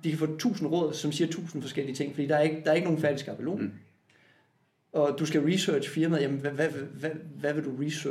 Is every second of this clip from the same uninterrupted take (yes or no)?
yes